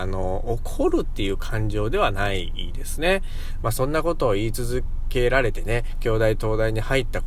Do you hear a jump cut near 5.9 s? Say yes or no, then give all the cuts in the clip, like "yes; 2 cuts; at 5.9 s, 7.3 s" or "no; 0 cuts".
no; 1 cut; at 3.6 s